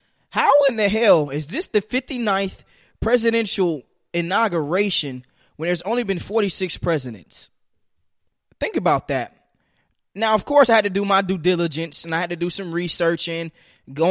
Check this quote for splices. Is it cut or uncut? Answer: uncut